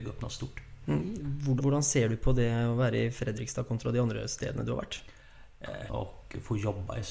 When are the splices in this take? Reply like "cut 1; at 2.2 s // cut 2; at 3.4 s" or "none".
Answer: cut 1; at 1.6 s // cut 2; at 5.9 s